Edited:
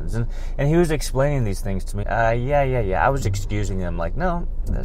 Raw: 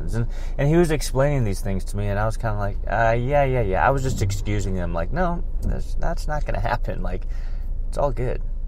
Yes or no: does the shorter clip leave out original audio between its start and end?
yes